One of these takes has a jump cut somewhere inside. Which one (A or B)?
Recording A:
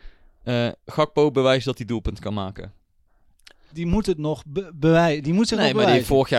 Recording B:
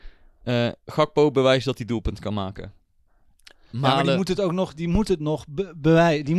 A